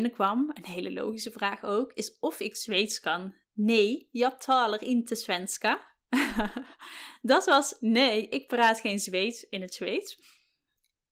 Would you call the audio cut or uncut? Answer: cut